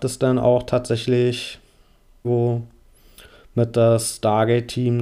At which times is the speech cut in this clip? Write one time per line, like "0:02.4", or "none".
0:02.2